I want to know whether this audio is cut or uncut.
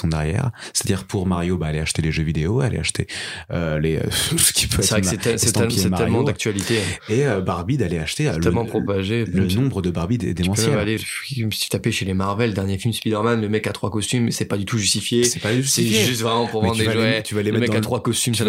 cut